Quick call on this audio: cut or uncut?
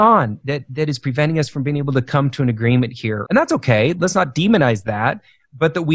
cut